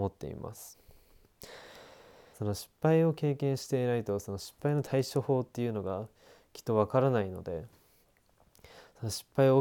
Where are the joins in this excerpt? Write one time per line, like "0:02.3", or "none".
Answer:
0:02.3